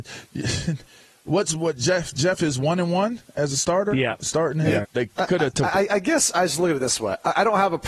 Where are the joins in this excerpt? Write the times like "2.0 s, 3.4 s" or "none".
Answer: 4.8 s